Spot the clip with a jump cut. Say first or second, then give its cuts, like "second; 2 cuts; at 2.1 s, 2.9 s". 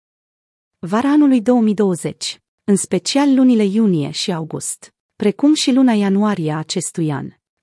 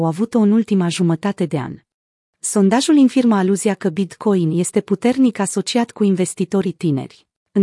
second; 1 cut; at 2.3 s